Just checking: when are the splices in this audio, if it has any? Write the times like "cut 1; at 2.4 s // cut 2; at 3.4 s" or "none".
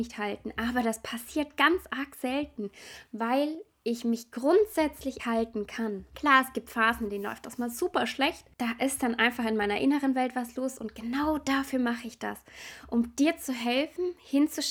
cut 1; at 5.2 s